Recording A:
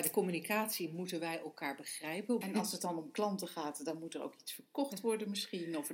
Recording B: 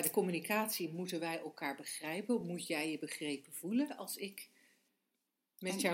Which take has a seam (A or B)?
A